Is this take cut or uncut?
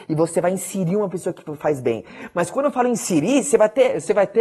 uncut